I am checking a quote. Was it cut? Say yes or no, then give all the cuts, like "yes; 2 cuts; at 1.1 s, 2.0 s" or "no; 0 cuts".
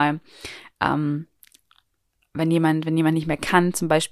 no; 0 cuts